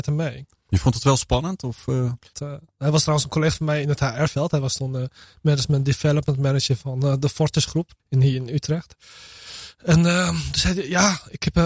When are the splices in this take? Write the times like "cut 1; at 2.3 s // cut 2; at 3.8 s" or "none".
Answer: cut 1; at 2.3 s // cut 2; at 8.0 s